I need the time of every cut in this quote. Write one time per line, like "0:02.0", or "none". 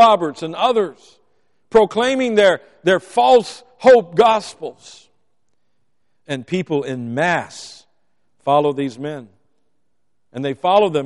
none